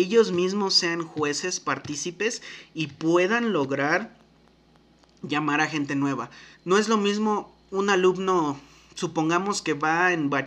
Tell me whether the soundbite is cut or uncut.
cut